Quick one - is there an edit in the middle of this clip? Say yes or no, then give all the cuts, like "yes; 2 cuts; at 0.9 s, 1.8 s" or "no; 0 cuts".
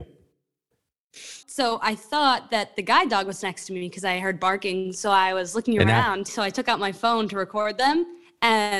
yes; 2 cuts; at 1.4 s, 6.3 s